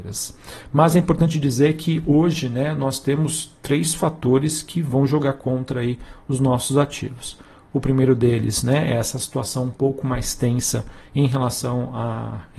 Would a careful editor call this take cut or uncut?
uncut